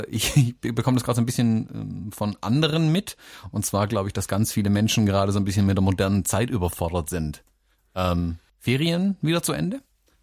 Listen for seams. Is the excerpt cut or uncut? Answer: cut